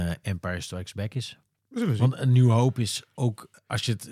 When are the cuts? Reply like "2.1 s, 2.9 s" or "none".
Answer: none